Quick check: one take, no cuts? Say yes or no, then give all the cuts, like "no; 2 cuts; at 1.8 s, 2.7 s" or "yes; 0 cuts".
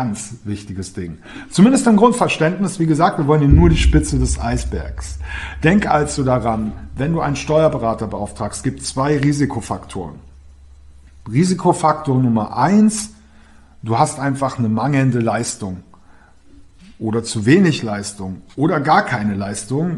yes; 0 cuts